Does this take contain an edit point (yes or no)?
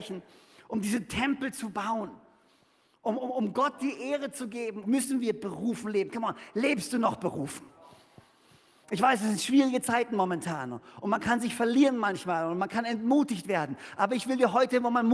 yes